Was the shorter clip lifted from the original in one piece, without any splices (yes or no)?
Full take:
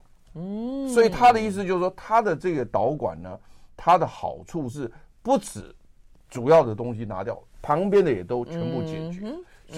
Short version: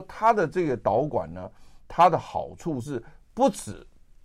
yes